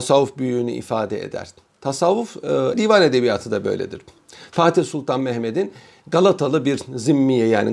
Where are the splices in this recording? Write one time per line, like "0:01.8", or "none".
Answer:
0:02.7